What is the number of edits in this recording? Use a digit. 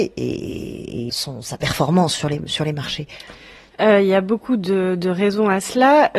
1